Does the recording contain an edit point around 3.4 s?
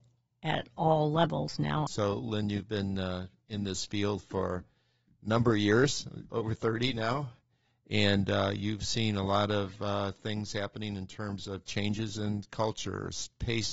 no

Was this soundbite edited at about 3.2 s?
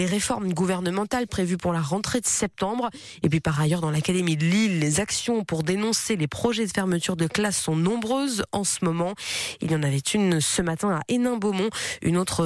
yes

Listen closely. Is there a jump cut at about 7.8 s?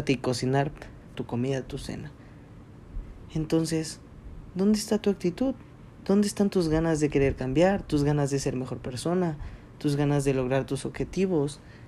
no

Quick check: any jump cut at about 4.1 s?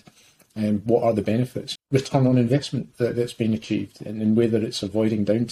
no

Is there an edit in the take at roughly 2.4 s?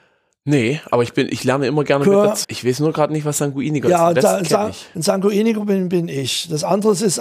yes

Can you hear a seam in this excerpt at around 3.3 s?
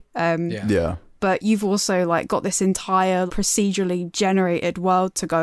yes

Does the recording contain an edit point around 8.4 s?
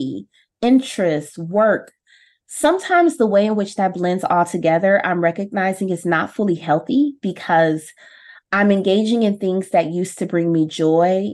no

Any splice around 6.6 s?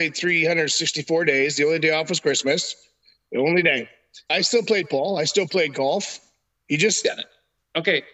no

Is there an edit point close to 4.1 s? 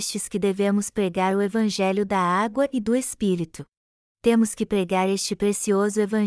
yes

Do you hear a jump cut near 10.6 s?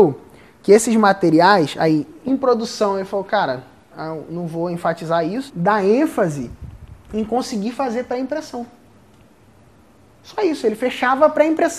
no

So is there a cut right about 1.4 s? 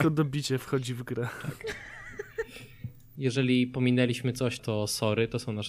no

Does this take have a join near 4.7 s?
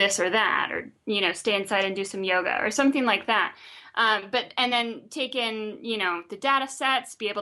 no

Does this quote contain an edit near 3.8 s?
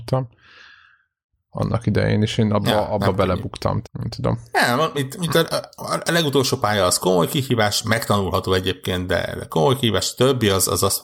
yes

